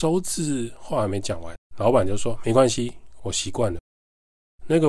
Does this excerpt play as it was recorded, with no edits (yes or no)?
no